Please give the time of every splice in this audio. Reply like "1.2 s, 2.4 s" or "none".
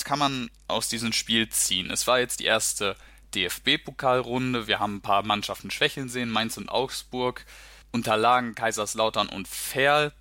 7.8 s